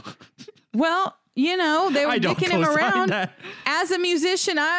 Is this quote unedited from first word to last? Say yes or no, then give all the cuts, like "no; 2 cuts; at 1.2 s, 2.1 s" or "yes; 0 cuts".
yes; 0 cuts